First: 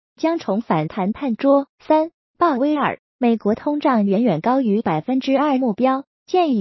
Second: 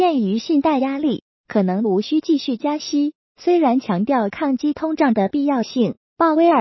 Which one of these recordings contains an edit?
first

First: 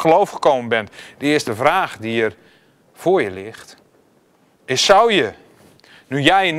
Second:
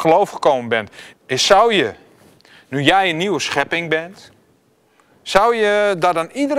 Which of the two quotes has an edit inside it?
second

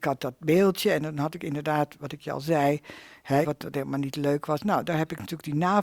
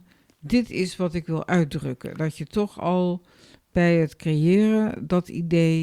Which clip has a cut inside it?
first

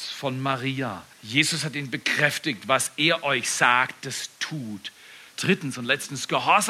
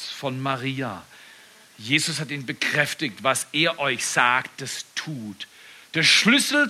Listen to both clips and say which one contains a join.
first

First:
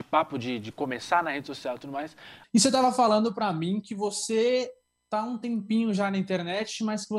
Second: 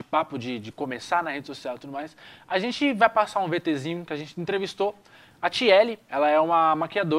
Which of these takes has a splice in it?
first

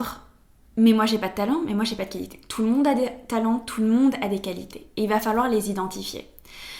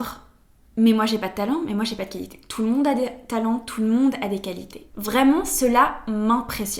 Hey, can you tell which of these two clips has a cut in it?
second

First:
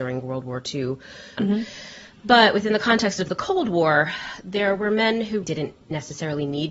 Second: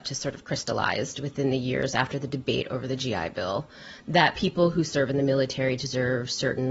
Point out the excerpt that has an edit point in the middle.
first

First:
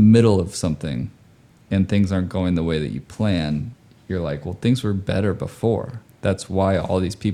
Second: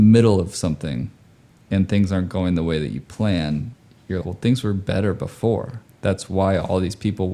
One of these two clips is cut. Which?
second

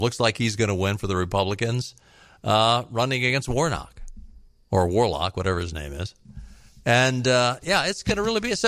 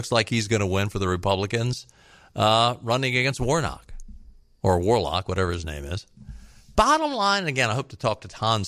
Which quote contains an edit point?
second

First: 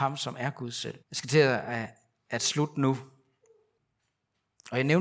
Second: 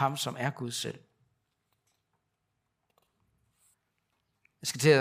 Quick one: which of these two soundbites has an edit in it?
first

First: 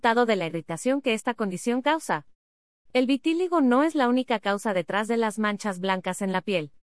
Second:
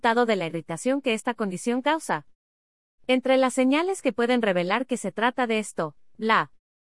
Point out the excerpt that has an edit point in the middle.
first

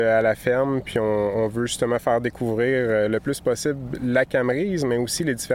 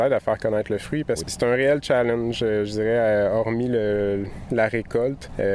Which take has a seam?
second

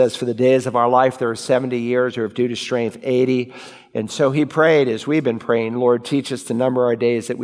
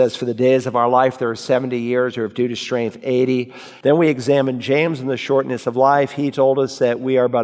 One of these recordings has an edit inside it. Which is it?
second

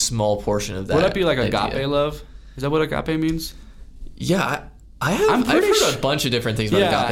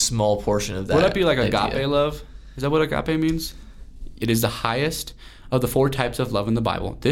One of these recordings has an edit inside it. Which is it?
second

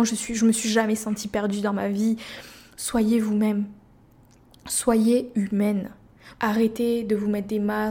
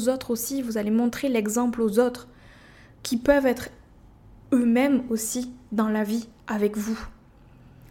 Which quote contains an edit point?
first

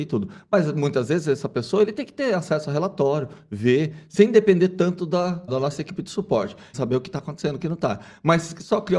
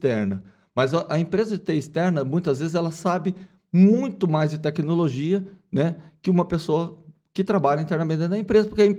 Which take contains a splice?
first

